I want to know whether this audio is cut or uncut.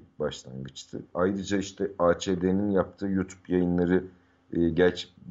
cut